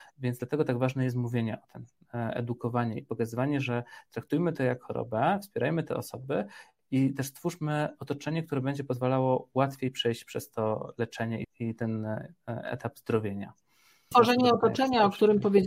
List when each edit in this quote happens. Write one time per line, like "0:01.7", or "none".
0:11.4
0:14.1